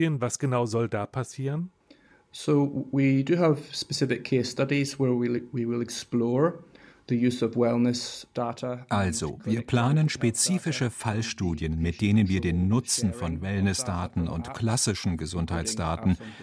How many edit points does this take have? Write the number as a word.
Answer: zero